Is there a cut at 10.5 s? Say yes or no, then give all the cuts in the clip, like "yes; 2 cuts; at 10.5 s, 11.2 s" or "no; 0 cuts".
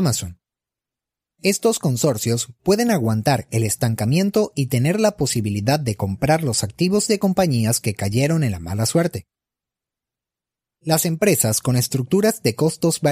no; 0 cuts